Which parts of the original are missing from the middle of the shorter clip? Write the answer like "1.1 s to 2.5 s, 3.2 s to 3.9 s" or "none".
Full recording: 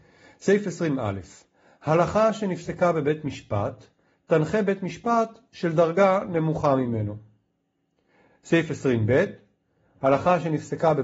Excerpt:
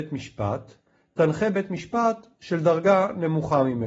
none